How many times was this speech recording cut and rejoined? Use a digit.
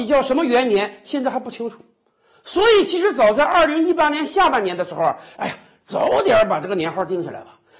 1